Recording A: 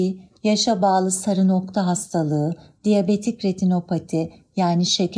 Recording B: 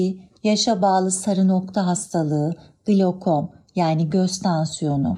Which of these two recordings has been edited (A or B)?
A